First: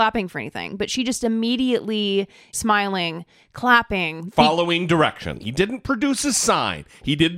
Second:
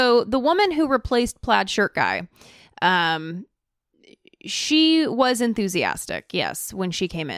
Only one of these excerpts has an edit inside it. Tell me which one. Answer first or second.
first